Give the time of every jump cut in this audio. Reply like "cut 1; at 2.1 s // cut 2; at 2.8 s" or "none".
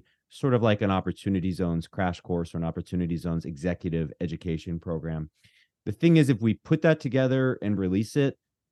none